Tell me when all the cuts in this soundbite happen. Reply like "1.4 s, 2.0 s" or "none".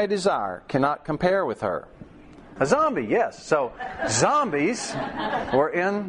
2.6 s